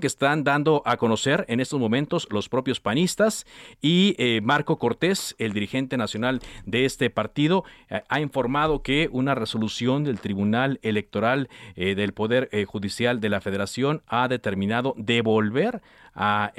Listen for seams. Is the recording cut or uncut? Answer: uncut